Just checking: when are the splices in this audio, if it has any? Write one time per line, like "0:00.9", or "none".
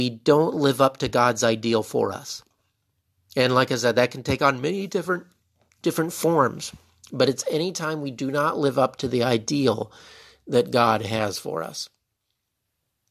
none